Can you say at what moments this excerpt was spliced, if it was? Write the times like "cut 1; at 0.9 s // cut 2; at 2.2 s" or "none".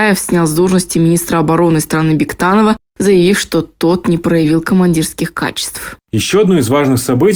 none